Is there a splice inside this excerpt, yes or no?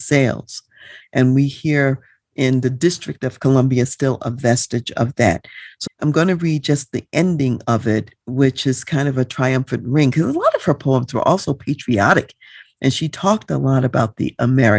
yes